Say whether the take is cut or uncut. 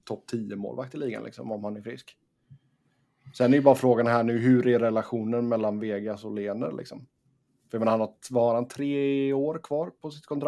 uncut